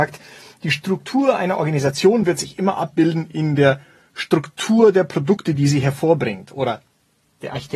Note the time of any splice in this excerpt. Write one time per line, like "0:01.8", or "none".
none